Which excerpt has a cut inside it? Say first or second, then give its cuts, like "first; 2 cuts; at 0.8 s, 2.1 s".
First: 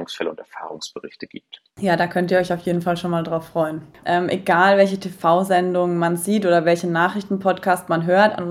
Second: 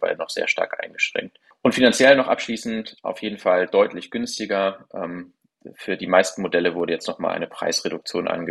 first; 2 cuts; at 1.7 s, 4.0 s